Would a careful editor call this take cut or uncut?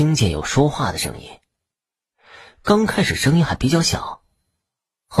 uncut